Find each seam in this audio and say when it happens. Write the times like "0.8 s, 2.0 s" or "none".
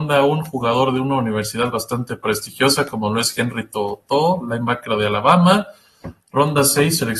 6.2 s